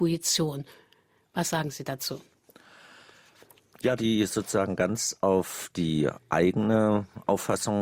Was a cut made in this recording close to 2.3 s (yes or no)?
no